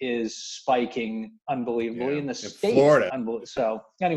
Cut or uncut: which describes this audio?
cut